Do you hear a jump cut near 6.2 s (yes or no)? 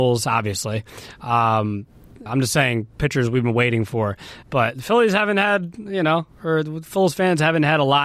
no